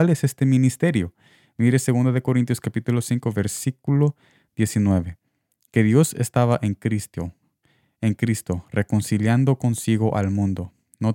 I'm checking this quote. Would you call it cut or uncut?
uncut